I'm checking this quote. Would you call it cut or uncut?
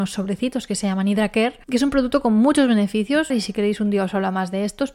cut